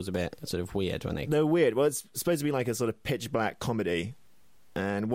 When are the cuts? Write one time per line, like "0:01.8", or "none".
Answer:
none